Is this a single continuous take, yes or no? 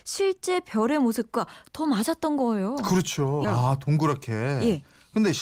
no